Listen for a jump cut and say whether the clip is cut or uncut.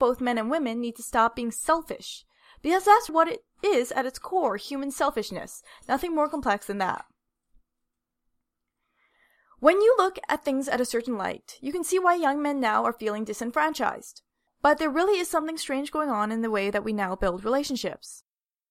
cut